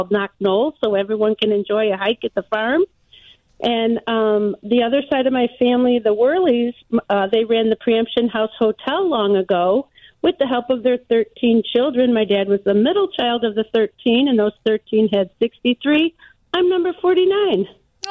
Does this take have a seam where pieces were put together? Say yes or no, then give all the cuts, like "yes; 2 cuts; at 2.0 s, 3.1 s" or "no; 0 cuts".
no; 0 cuts